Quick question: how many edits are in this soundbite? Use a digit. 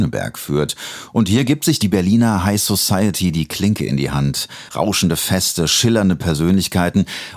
0